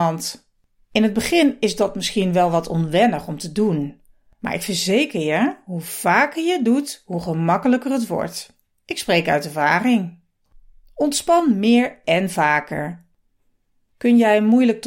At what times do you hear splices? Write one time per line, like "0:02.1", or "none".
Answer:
none